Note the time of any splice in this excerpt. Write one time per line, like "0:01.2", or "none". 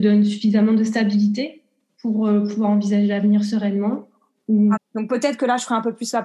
0:04.8